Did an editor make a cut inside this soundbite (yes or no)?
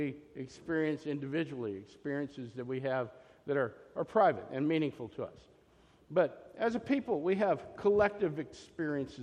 no